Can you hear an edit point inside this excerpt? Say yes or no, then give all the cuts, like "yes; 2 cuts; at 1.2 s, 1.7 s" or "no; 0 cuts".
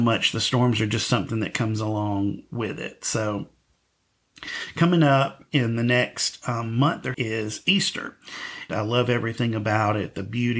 yes; 2 cuts; at 7.1 s, 8.7 s